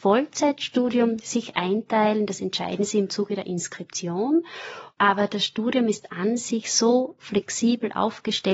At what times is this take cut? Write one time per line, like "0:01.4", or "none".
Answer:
0:04.9